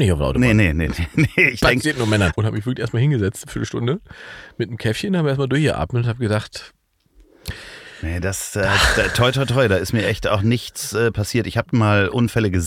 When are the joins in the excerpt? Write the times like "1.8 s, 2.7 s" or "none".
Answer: 2.3 s